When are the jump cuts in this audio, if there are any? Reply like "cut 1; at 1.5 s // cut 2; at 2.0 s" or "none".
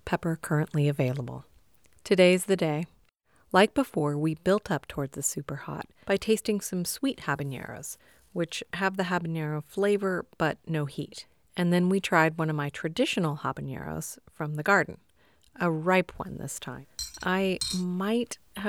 none